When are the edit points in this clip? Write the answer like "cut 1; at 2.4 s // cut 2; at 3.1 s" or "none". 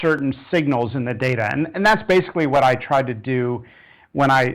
none